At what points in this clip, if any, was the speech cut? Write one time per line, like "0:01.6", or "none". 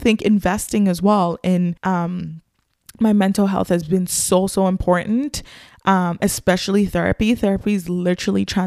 0:01.8